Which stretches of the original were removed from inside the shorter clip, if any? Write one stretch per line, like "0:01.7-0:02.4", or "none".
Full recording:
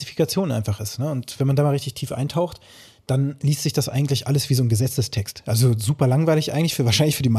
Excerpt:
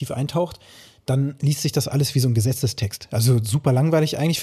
0:03.9-0:04.2